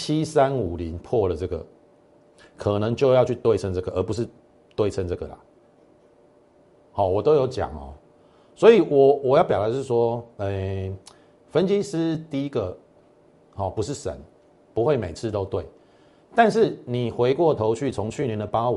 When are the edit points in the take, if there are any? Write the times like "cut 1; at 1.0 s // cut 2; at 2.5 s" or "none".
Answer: none